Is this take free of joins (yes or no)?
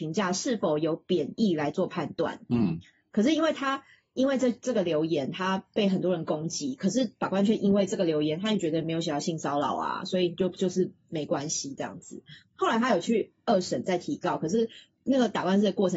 yes